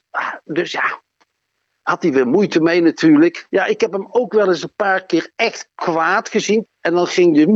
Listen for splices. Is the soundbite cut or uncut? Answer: cut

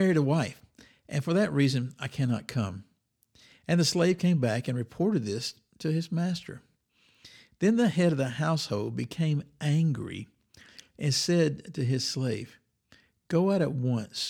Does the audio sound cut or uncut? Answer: uncut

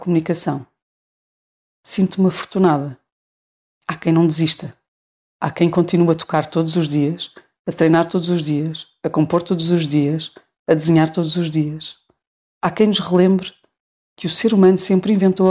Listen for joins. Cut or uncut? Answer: uncut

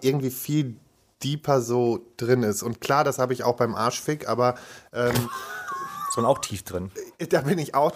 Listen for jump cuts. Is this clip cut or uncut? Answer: uncut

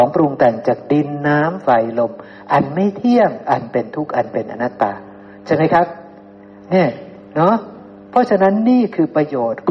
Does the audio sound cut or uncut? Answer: uncut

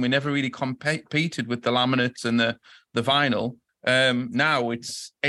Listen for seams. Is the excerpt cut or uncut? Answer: cut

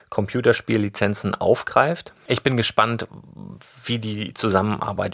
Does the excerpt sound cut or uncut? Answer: cut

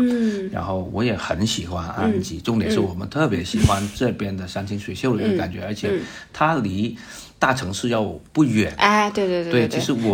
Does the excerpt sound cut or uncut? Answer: uncut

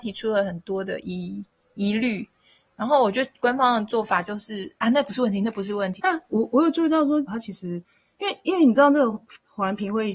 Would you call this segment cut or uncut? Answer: cut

